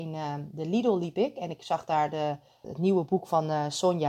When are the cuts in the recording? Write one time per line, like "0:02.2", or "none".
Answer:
0:02.6